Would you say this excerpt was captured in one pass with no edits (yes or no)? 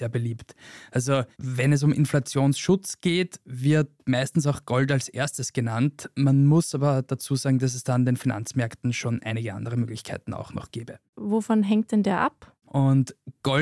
no